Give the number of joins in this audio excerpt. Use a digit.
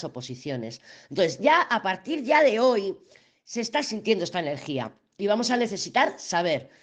0